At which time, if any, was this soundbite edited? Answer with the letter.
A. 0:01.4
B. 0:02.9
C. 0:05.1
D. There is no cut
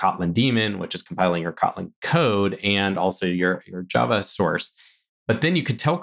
D